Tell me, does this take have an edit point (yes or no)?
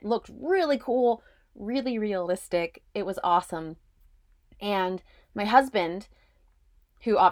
no